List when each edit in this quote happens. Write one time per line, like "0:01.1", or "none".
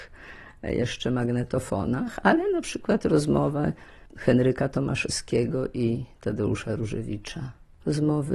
none